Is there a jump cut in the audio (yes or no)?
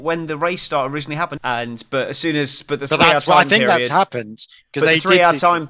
yes